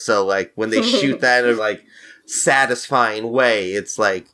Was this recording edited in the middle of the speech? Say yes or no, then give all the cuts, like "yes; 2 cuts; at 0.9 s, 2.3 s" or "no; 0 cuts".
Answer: yes; 1 cut; at 1.6 s